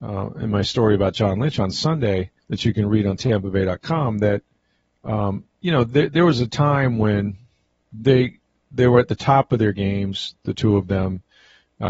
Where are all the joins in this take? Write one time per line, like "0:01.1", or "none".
0:02.4